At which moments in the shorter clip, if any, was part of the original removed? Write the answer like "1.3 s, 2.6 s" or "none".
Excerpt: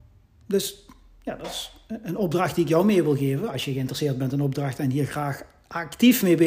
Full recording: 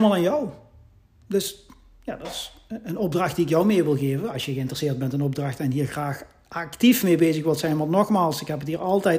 none